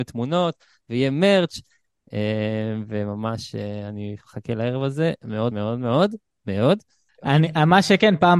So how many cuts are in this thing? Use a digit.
2